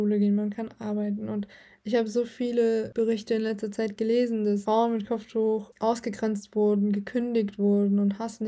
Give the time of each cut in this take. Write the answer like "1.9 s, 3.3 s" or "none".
none